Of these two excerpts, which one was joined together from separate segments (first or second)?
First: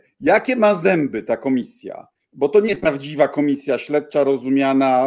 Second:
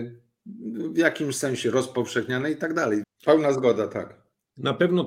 second